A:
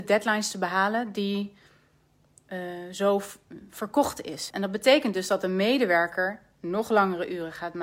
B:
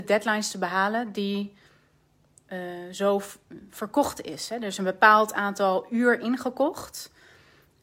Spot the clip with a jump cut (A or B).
A